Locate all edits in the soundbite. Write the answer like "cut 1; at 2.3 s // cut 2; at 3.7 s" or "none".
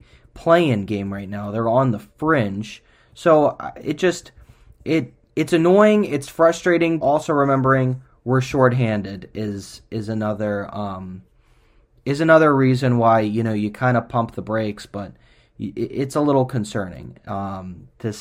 cut 1; at 7.0 s